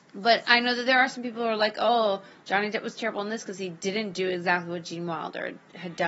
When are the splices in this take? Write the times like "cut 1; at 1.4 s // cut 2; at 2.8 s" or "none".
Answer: none